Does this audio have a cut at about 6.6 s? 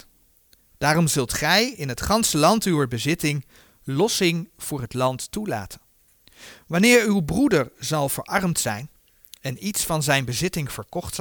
no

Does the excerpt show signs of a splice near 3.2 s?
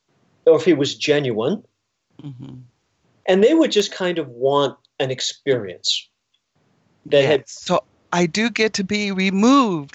no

